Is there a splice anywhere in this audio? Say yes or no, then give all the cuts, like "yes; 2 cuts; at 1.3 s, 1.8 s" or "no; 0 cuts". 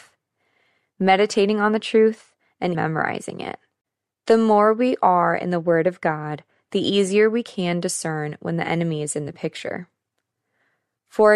yes; 1 cut; at 2.7 s